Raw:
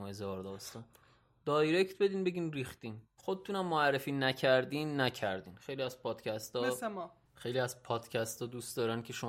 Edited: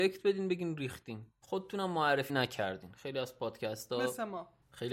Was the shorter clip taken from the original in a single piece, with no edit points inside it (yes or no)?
no